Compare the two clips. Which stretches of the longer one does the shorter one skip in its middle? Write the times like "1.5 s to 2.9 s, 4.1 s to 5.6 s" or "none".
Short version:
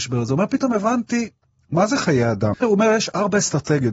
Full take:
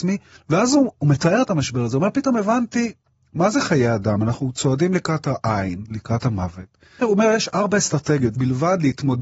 4.2 s to 6.9 s